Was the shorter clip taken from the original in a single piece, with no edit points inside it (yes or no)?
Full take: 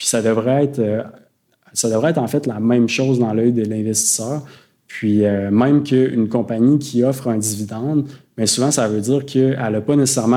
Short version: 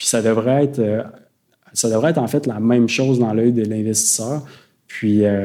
yes